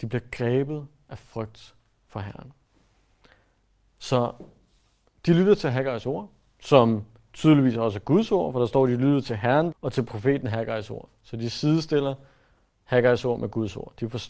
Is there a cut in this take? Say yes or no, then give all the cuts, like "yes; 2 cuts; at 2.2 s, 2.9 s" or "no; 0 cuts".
yes; 1 cut; at 9.7 s